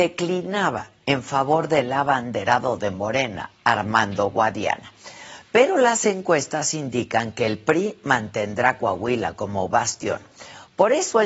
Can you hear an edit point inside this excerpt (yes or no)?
no